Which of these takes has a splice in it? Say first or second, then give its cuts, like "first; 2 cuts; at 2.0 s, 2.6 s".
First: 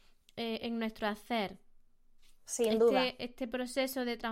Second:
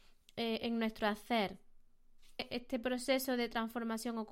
second; 1 cut; at 2.4 s